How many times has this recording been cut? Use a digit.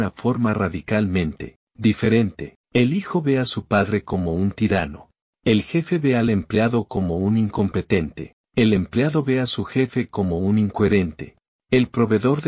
1